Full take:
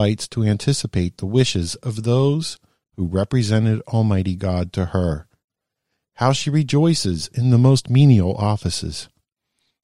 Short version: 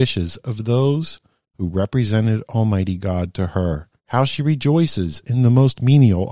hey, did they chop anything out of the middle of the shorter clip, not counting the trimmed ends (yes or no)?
yes